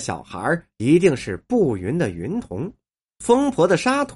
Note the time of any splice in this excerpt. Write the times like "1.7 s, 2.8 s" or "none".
3.1 s

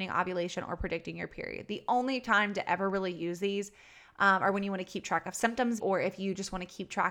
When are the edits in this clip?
5.8 s

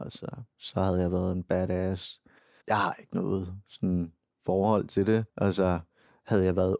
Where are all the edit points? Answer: 2.6 s, 5.3 s

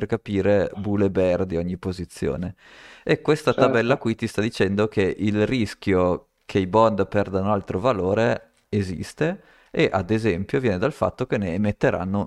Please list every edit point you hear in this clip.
none

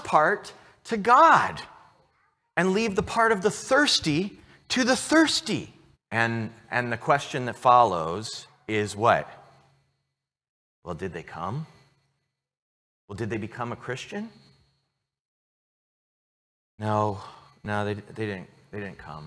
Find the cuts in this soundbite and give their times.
5.9 s

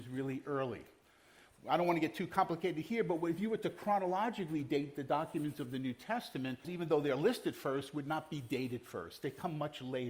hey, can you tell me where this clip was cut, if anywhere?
6.6 s

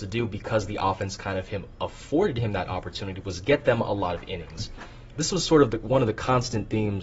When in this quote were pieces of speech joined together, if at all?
5.1 s

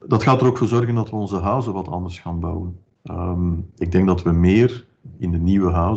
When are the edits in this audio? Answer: none

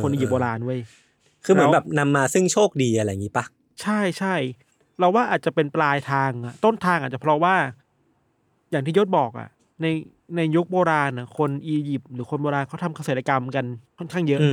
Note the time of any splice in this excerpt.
none

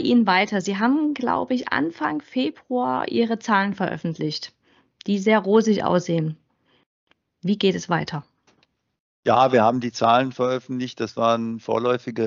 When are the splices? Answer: none

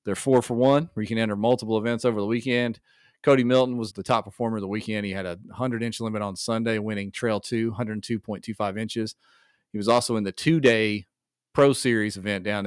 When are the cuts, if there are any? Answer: 3.9 s

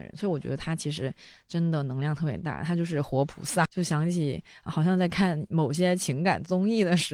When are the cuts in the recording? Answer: 3.7 s

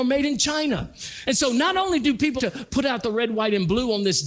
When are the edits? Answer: 1.3 s, 2.4 s

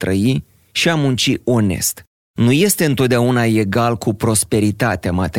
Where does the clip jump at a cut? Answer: 2.2 s

